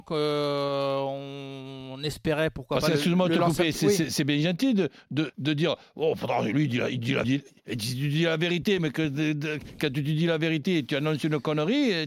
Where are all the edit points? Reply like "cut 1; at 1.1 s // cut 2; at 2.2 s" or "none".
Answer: cut 1; at 5.3 s // cut 2; at 7.2 s